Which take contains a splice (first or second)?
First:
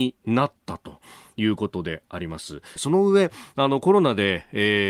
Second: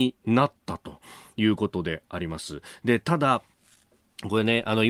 first